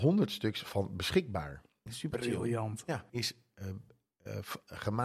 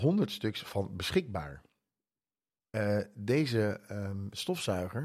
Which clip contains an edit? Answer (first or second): first